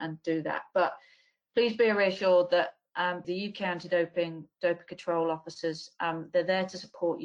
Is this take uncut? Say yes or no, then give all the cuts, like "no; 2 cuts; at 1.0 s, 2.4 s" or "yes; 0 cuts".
no; 1 cut; at 3.2 s